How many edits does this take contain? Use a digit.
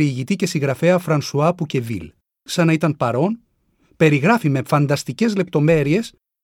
1